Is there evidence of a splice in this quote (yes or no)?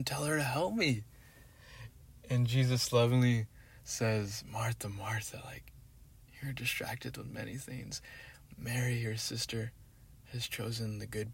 no